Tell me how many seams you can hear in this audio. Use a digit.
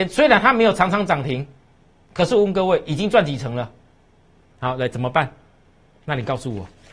1